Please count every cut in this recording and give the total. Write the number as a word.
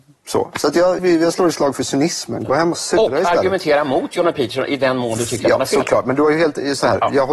one